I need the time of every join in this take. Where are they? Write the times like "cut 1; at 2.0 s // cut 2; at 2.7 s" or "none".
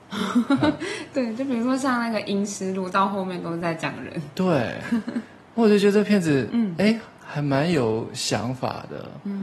none